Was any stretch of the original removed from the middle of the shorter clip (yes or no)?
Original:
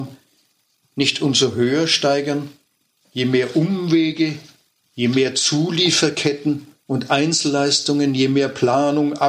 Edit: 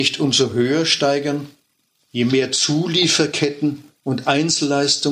yes